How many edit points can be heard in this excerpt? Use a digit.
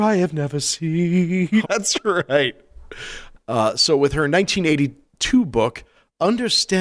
1